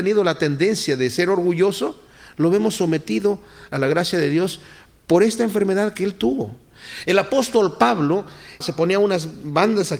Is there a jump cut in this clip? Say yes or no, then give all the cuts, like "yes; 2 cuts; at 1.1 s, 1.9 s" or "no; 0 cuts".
yes; 2 cuts; at 7.0 s, 8.6 s